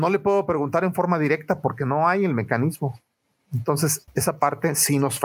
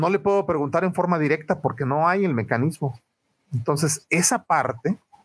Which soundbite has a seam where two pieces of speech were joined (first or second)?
first